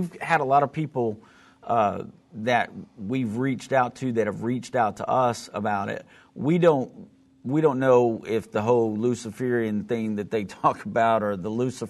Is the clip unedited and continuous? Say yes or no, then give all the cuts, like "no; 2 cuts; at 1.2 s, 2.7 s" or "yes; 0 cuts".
yes; 0 cuts